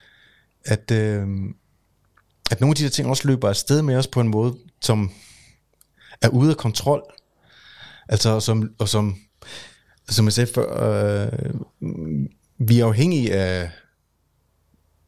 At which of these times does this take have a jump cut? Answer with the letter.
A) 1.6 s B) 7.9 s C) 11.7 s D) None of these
D